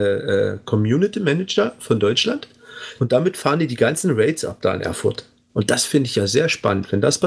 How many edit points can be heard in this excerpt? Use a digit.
1